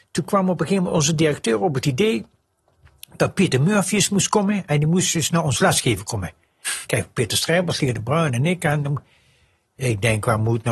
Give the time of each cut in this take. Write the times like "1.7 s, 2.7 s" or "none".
none